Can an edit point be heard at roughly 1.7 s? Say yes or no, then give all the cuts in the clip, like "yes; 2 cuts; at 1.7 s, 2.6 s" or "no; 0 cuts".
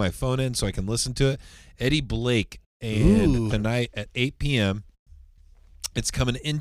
no; 1 cut; at 3.5 s